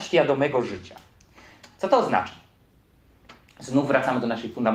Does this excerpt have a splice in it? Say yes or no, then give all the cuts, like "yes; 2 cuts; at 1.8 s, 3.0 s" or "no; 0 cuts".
no; 0 cuts